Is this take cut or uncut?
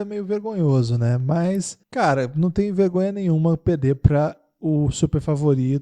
cut